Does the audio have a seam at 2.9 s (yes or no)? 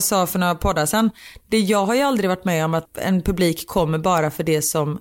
yes